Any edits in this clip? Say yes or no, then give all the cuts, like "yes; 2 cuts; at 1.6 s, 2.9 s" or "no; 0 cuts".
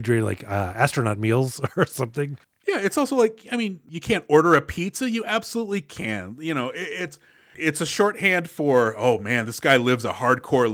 no; 0 cuts